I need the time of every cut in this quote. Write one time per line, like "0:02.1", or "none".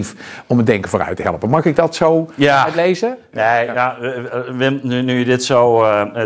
none